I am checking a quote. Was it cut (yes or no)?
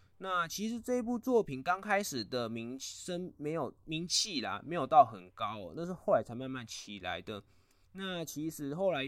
no